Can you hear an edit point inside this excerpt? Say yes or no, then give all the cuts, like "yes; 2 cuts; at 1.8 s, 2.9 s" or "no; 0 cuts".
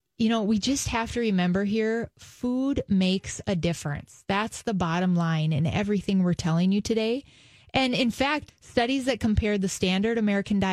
yes; 1 cut; at 8.5 s